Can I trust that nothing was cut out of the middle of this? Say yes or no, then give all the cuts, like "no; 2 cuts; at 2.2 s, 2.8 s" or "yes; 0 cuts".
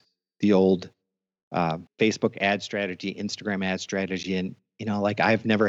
no; 1 cut; at 1.9 s